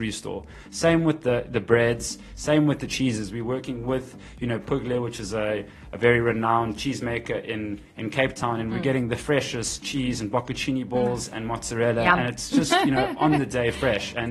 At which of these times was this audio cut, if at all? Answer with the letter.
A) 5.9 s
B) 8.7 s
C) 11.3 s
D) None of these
D